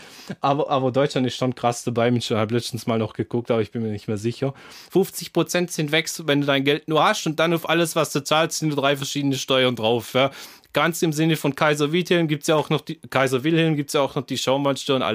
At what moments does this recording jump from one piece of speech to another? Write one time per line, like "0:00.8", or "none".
0:04.9

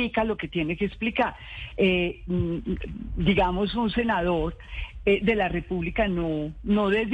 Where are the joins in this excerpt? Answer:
none

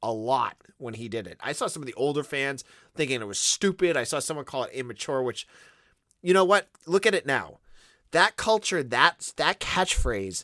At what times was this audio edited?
none

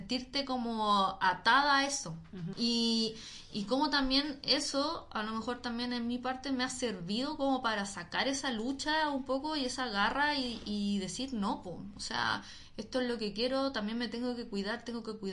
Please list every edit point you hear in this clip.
0:02.5

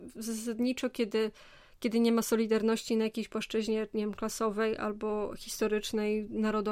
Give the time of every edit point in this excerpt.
none

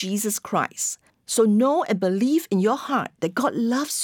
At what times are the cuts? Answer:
0:01.1

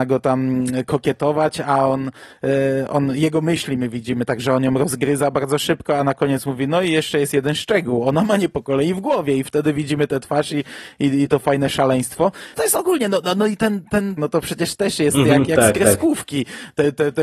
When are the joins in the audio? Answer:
0:12.5
0:14.2

